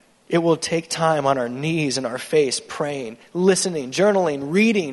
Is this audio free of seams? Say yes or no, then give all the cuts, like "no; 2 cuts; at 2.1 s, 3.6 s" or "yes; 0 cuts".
yes; 0 cuts